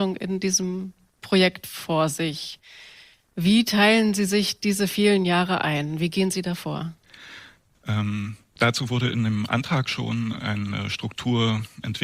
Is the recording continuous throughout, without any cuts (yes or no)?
yes